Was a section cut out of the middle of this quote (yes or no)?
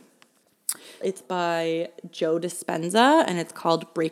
yes